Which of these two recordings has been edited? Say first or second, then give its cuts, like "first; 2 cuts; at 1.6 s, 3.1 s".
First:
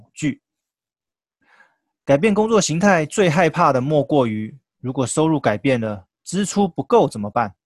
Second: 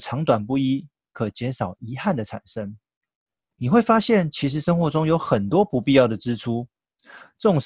second; 1 cut; at 3.5 s